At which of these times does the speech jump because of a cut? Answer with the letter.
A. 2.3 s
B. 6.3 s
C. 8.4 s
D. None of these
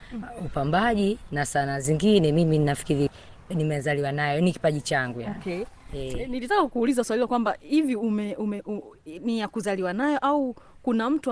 D